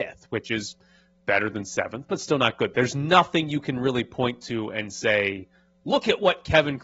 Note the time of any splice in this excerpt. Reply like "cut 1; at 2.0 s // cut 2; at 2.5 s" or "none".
cut 1; at 2.7 s